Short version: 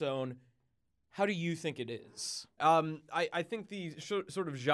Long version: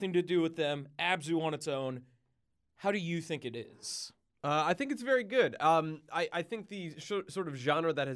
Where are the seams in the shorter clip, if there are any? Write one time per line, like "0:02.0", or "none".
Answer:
0:02.6